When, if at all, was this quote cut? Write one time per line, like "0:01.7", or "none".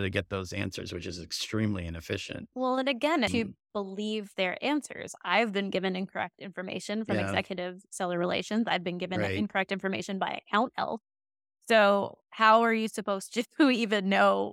0:03.3

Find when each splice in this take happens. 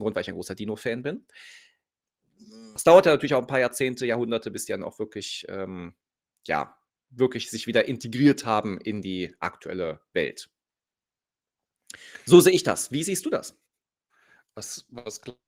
0:02.8

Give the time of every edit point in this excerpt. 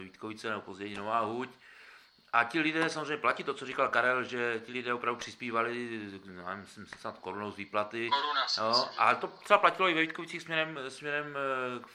none

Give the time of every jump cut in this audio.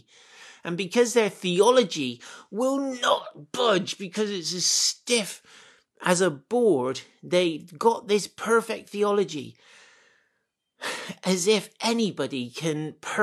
none

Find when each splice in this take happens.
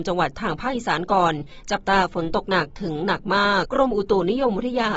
0:03.6

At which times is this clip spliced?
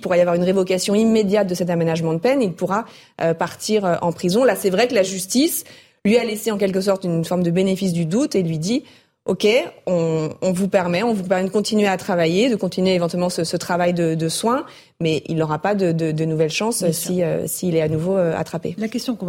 none

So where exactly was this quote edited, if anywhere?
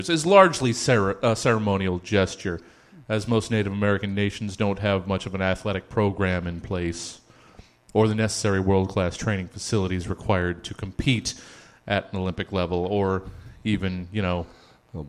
none

